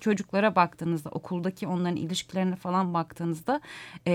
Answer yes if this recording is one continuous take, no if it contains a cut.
yes